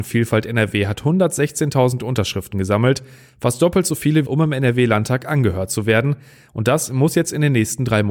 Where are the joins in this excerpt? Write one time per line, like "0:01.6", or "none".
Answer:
0:04.2